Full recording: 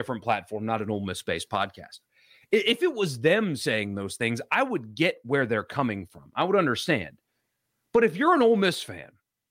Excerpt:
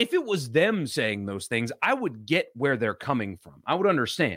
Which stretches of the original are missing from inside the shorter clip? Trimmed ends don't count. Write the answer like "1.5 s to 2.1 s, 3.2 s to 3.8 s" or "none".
none